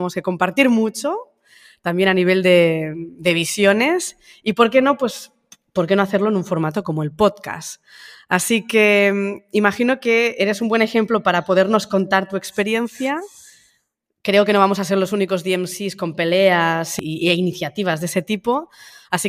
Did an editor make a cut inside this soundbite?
no; 0 cuts

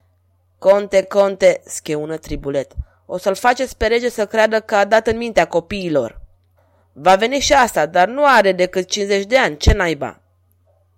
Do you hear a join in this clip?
no; 0 cuts

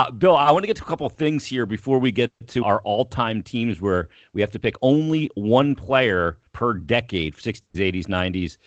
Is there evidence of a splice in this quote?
yes; 3 cuts; at 2.6 s, 6.5 s, 7.7 s

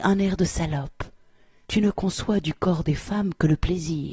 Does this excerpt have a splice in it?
yes; 1 cut; at 1.6 s

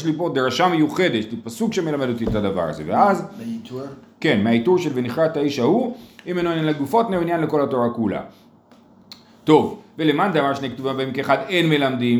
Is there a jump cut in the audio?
no; 0 cuts

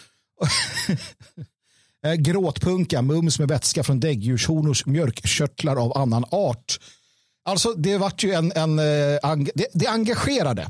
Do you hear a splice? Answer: no; 0 cuts

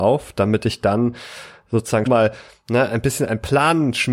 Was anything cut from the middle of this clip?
yes; 1 cut; at 2.1 s

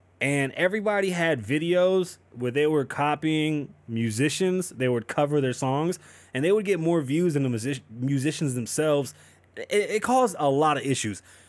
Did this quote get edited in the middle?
no; 0 cuts

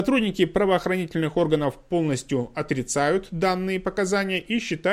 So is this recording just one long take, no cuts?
yes; 0 cuts

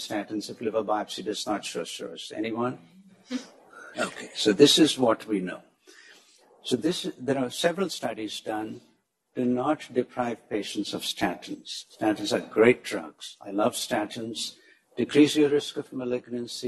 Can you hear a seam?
no; 0 cuts

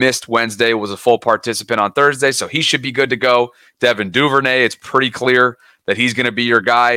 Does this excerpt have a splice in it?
no; 0 cuts

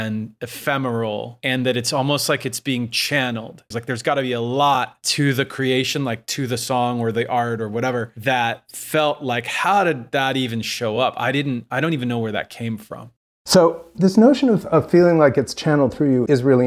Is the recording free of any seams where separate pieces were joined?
no; 1 cut; at 3.7 s

